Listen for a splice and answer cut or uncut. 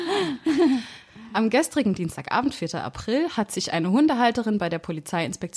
uncut